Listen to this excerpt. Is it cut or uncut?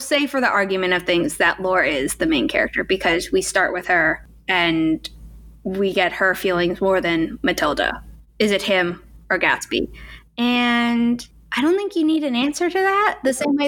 cut